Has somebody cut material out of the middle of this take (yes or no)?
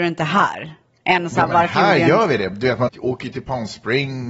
yes